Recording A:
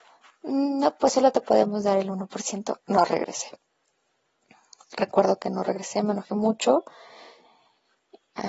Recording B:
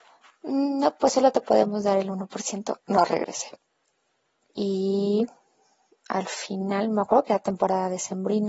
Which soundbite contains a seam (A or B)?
B